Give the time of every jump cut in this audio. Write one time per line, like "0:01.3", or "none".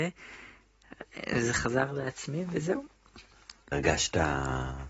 0:03.7